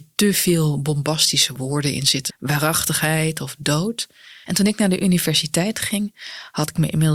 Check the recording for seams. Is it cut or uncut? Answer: cut